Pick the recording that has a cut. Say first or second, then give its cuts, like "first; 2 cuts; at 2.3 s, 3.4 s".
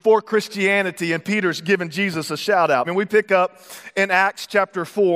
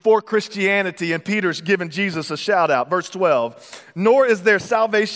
first; 1 cut; at 2.8 s